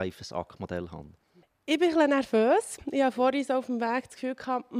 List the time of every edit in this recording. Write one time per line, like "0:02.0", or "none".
none

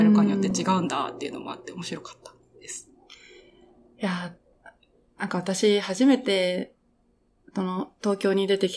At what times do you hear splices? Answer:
none

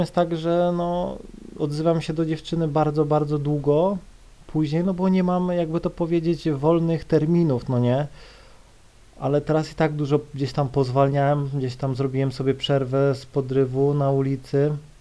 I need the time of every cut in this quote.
none

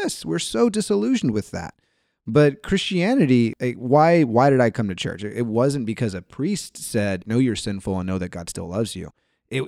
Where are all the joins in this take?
0:07.2

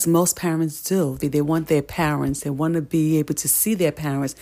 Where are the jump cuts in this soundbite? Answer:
0:01.2

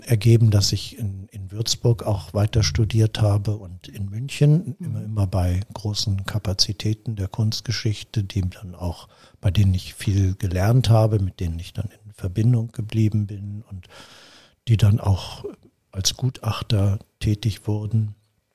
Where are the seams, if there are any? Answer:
none

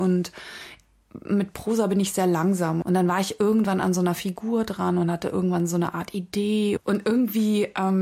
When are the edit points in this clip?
0:02.8
0:06.8

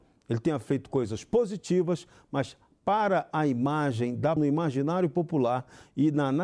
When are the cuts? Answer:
0:04.4

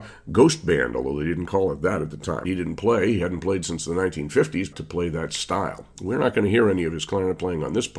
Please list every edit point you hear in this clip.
0:02.4
0:04.7

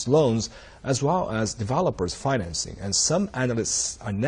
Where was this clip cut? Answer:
none

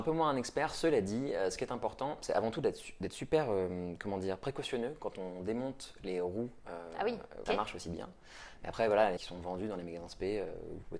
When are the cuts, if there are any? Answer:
0:07.5
0:09.2

